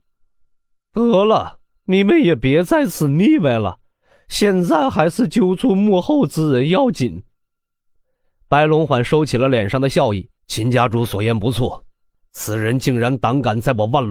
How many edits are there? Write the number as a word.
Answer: two